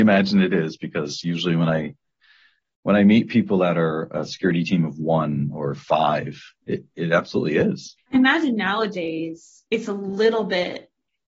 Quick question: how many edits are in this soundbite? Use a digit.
2